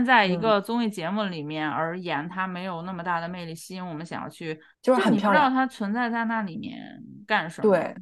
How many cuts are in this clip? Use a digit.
1